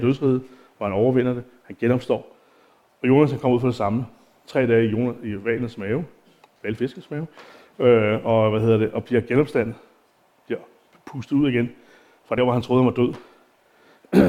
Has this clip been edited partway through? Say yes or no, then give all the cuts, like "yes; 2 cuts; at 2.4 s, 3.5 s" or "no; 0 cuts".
no; 0 cuts